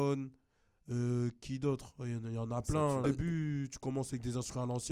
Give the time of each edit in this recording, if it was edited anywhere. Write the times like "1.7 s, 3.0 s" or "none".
3.0 s